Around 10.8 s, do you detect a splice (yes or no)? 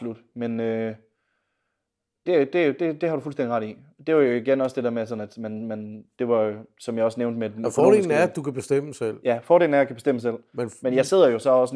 no